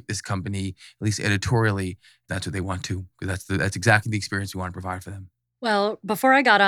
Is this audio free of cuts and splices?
no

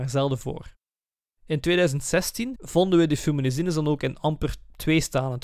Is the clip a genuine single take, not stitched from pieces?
no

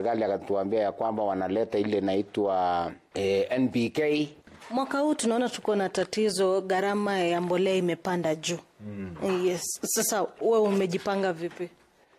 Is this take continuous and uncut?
yes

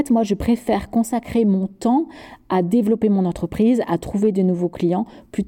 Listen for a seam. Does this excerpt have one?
no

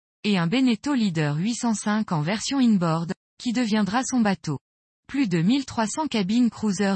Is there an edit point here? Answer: yes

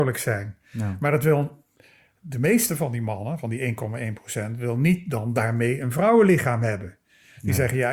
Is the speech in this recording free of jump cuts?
yes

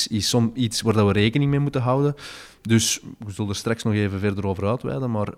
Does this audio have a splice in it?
no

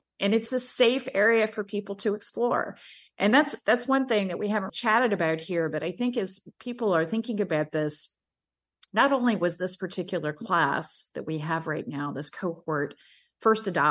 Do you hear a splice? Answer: yes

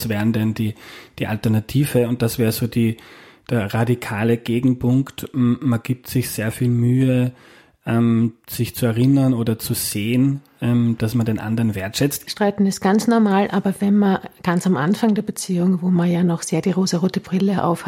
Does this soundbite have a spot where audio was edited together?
yes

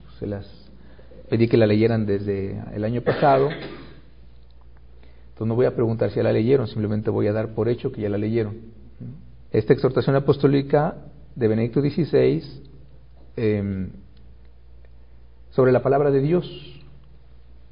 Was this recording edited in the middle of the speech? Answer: yes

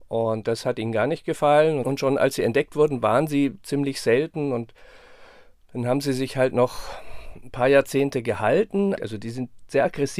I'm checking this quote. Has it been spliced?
yes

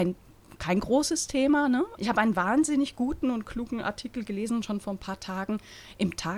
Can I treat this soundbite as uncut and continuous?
no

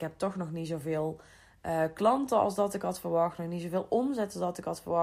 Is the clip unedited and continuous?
yes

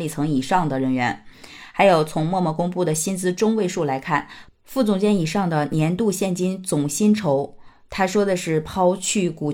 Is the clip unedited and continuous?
yes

